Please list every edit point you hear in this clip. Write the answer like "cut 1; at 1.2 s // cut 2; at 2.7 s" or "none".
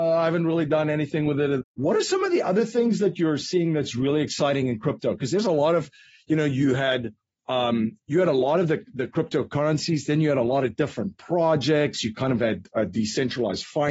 cut 1; at 1.6 s